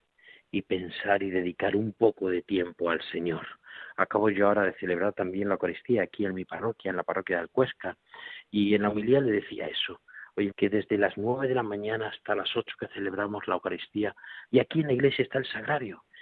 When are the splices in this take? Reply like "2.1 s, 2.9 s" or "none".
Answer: 10.5 s, 14.4 s